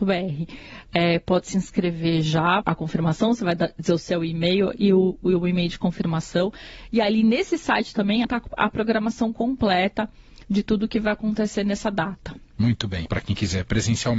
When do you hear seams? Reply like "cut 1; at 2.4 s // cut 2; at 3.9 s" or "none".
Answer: cut 1; at 2.6 s // cut 2; at 8.2 s // cut 3; at 13.1 s